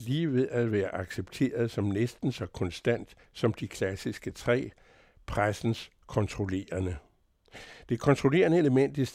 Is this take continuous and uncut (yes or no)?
yes